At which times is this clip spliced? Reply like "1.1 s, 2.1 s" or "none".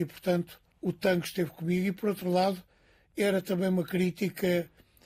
none